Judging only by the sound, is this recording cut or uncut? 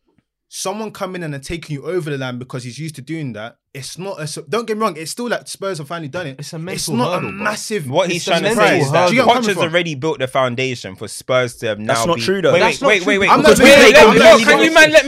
cut